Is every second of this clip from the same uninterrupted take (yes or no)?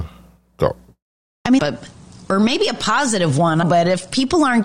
no